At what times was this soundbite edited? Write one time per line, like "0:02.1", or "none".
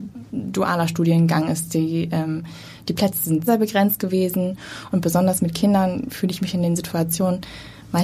0:03.5
0:04.9